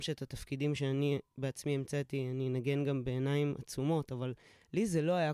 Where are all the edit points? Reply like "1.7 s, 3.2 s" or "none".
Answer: none